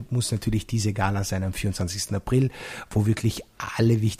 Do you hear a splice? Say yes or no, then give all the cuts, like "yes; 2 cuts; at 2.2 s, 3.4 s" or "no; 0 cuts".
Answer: no; 0 cuts